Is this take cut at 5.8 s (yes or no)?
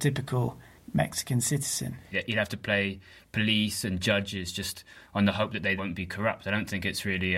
yes